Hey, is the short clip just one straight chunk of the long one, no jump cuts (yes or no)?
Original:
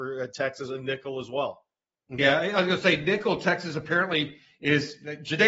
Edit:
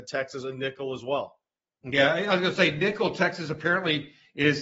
yes